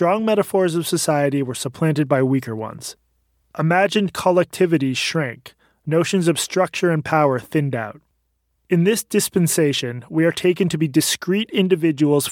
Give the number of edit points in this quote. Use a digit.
0